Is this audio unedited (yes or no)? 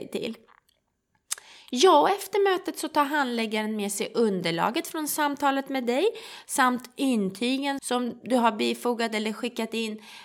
no